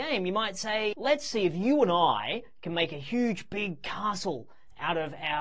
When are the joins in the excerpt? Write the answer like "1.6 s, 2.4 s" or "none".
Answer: 0.9 s